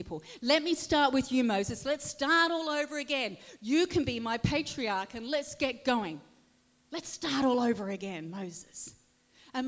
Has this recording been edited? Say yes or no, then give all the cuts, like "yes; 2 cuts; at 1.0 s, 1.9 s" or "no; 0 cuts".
no; 0 cuts